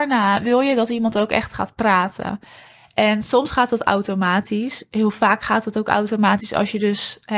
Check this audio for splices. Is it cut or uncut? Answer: uncut